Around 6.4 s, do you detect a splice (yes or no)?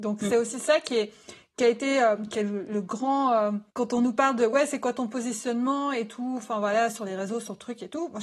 no